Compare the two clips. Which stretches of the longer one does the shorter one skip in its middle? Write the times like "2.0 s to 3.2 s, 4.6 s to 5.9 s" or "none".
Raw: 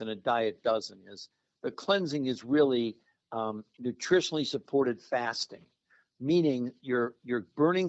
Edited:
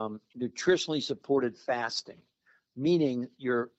none